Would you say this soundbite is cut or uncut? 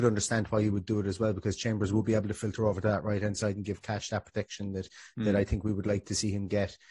uncut